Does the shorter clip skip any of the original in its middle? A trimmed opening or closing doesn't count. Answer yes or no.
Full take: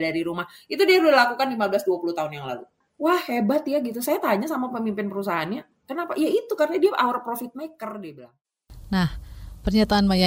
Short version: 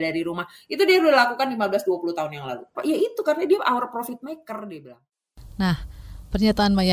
yes